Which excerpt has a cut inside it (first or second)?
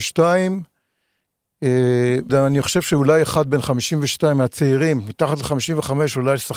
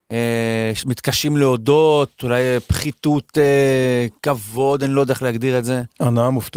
first